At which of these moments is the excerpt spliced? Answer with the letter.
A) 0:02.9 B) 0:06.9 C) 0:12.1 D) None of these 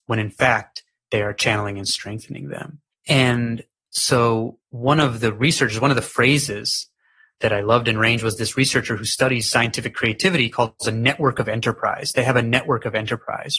A